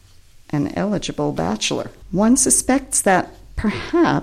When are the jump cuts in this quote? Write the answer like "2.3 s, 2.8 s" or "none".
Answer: 2.0 s

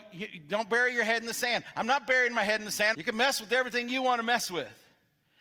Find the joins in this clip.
2.9 s

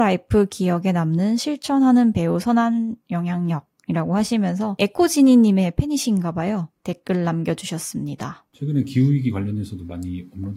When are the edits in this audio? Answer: none

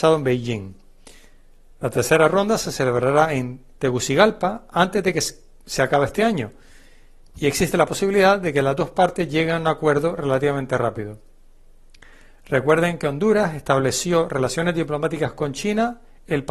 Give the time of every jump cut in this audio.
none

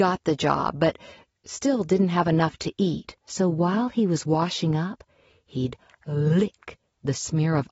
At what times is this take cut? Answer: 3.2 s

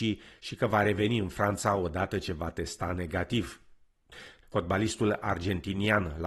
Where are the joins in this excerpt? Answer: 4.4 s

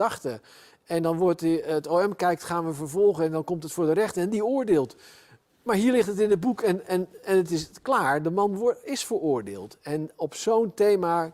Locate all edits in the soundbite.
none

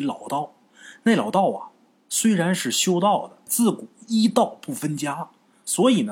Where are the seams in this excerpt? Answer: 3.5 s

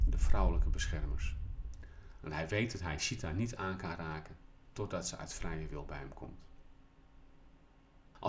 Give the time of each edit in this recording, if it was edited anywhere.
none

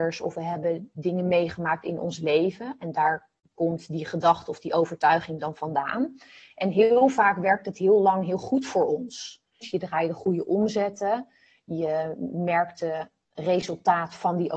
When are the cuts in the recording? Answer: 9.6 s

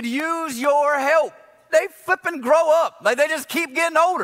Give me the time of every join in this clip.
1.7 s

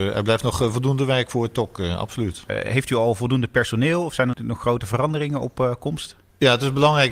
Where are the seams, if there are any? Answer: 2.5 s, 4.3 s

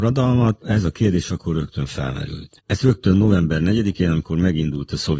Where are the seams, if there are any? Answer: 2.6 s

